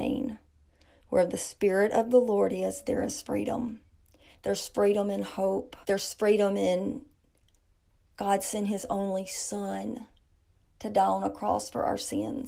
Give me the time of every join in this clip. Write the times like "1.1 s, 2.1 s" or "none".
4.3 s, 5.8 s